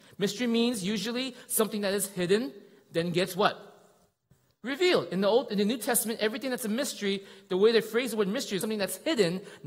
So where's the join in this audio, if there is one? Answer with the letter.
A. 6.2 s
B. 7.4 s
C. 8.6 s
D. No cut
C